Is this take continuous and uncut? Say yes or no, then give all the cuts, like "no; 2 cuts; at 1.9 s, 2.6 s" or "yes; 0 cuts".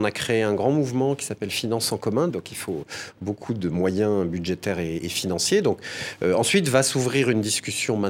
no; 2 cuts; at 2.3 s, 5.0 s